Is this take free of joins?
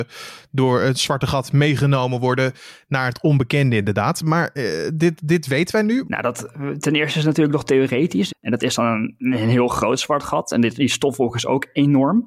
no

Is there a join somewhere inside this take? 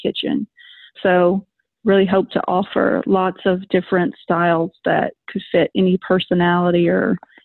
yes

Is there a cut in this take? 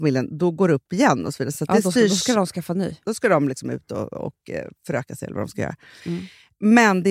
no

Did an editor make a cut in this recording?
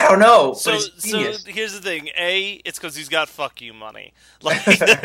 no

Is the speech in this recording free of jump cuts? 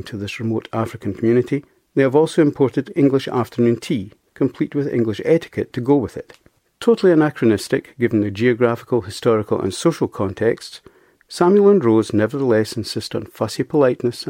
yes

